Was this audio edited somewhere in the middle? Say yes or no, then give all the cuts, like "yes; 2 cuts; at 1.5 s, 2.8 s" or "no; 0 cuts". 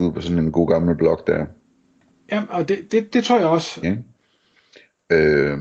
yes; 1 cut; at 3.8 s